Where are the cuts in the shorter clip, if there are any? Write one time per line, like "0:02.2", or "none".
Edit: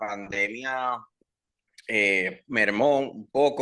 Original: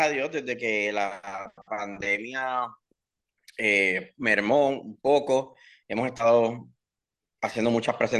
none